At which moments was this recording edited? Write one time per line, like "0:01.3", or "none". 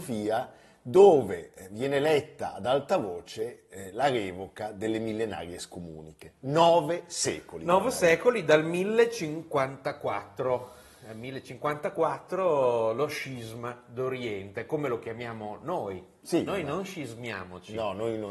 0:16.5